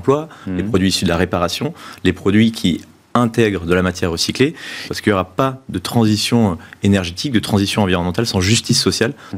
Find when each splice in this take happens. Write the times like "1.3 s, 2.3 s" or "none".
4.9 s